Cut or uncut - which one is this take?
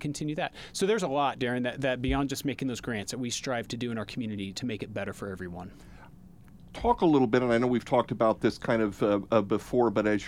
uncut